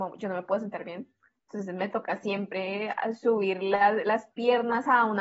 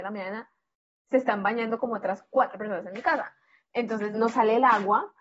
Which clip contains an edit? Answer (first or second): second